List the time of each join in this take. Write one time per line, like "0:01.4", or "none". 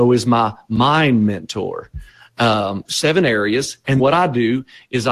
0:02.8
0:04.0